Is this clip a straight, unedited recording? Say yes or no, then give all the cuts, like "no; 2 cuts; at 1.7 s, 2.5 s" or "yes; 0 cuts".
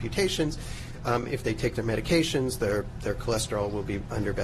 yes; 0 cuts